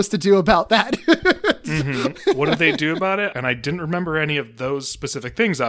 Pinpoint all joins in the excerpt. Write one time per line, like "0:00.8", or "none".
0:02.1
0:03.3